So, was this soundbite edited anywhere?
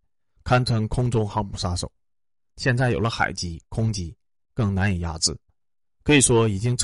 yes; 2 cuts; at 2.5 s, 4.4 s

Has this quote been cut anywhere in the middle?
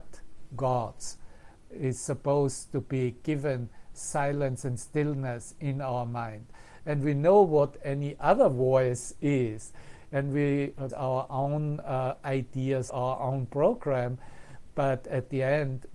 yes; 2 cuts; at 10.9 s, 12.9 s

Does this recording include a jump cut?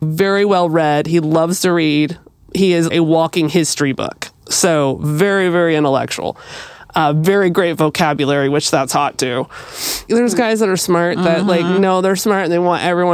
yes; 1 cut; at 10.1 s

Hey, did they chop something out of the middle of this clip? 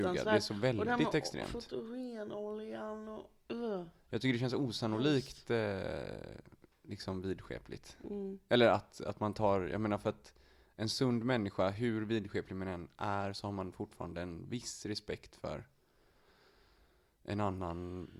no; 0 cuts

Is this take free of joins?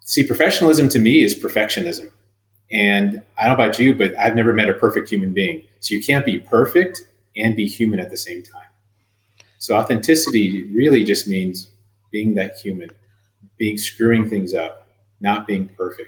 yes; 0 cuts

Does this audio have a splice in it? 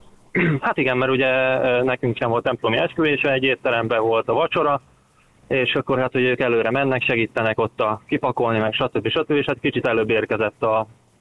no; 0 cuts

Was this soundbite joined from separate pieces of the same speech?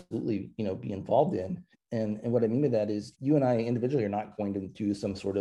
yes; 2 cuts; at 1.7 s, 3.1 s

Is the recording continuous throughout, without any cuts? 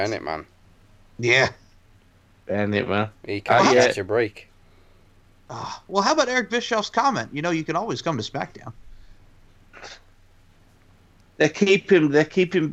yes; 0 cuts

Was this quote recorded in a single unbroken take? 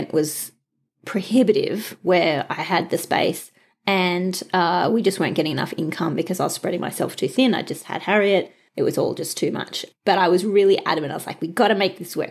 yes; 0 cuts

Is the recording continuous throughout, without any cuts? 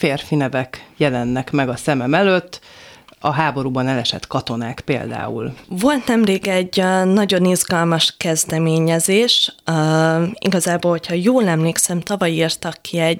no; 1 cut; at 5.6 s

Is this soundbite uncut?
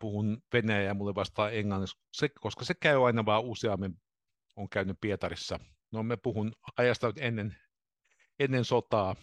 yes; 0 cuts

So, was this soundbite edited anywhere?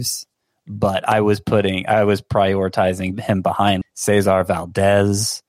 yes; 1 cut; at 3.8 s

